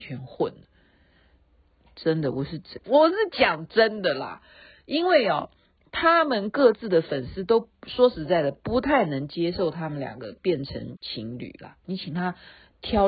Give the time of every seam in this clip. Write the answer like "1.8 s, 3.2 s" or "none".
2.8 s, 11.8 s